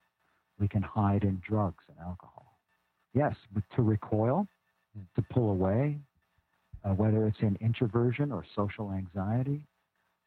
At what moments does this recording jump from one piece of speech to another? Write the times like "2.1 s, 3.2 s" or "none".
3.0 s